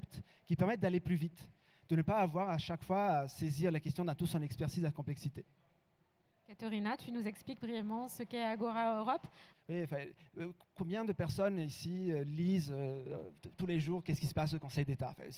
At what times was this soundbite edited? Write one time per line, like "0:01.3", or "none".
0:06.3
0:09.5

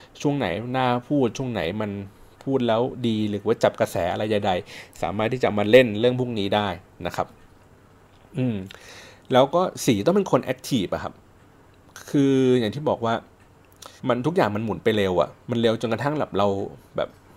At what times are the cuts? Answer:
0:14.0

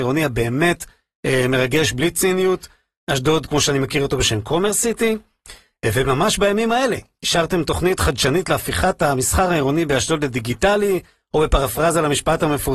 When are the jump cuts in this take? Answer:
none

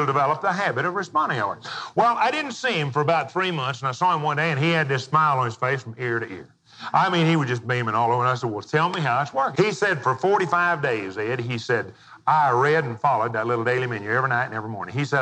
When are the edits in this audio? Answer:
0:09.5

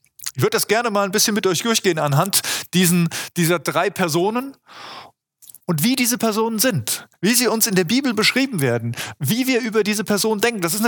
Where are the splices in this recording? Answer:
0:05.6

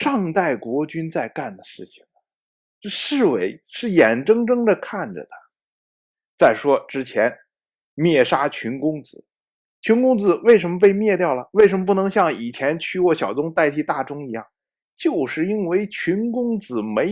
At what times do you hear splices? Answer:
none

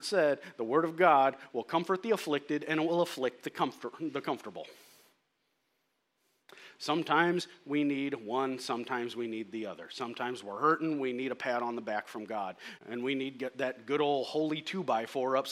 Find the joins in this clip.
0:12.8

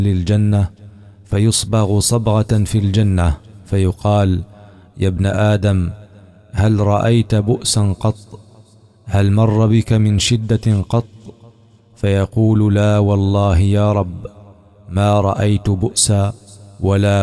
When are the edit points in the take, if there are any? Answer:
none

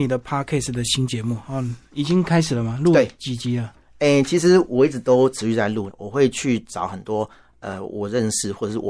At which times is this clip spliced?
0:05.9

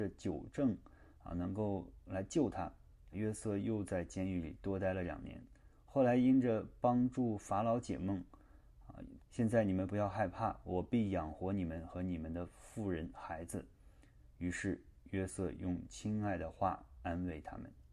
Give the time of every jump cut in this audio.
0:03.1
0:09.2

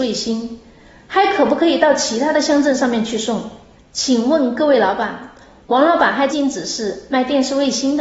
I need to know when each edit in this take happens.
0:06.3

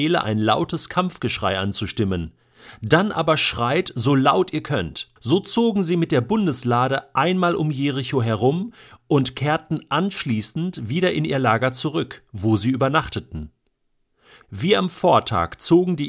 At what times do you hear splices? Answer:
0:05.2
0:14.4

